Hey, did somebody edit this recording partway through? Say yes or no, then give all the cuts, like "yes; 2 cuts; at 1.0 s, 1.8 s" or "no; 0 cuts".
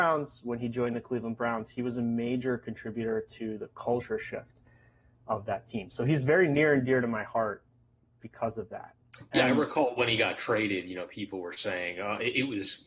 no; 0 cuts